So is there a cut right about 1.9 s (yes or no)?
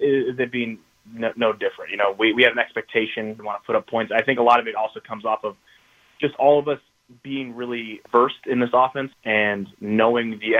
no